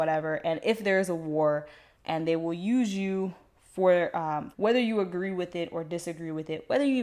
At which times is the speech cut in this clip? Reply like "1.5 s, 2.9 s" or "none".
1.9 s, 4.5 s